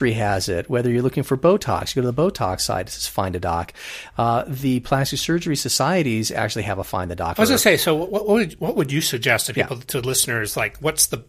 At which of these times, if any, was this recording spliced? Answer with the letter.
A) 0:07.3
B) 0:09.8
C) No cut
A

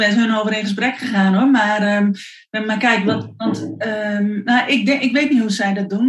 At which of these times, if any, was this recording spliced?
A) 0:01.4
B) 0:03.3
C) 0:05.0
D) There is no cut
D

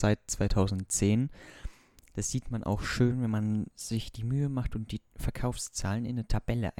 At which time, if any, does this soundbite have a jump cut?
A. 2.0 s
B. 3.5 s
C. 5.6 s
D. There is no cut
D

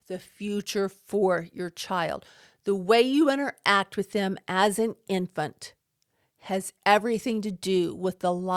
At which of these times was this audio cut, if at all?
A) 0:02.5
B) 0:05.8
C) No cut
C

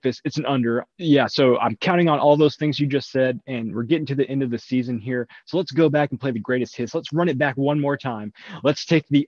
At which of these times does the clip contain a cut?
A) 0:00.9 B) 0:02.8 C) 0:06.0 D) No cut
A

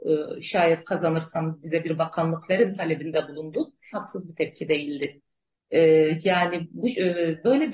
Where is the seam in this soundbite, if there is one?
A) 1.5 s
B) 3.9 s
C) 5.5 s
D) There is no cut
B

